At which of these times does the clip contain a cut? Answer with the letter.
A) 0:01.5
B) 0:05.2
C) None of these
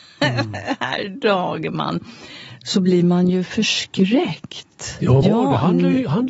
B